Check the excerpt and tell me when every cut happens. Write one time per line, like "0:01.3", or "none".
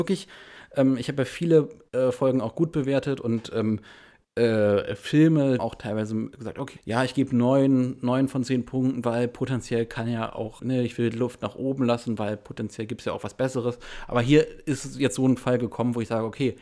0:05.6
0:06.8
0:10.6